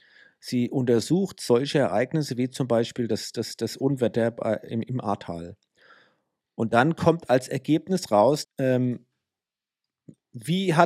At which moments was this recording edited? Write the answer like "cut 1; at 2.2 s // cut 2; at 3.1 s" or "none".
cut 1; at 8.4 s